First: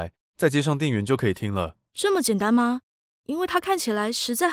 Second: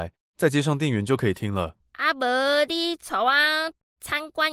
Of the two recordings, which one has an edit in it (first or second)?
second